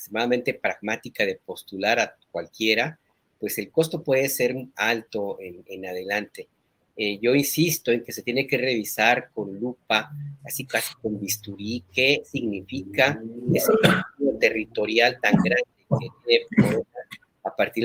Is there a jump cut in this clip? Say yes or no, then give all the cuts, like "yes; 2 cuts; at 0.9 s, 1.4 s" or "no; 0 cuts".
no; 0 cuts